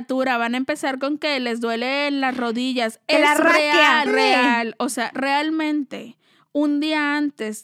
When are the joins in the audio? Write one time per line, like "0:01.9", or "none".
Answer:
0:04.1